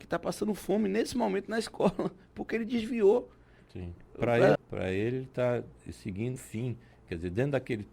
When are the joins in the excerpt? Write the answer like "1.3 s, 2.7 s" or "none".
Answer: 4.6 s, 6.4 s